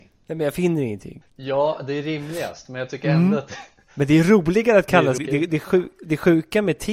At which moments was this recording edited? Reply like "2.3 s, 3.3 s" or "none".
1.2 s, 5.2 s